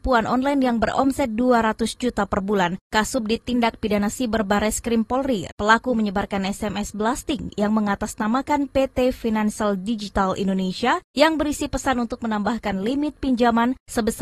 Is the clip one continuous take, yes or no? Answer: no